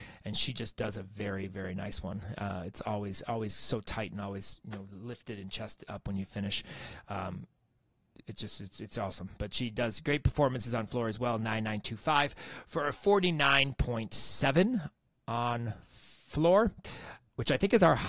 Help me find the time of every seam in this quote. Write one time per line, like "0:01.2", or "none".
none